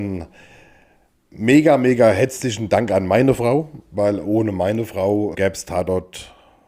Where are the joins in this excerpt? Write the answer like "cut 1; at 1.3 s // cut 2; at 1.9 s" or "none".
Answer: cut 1; at 5.3 s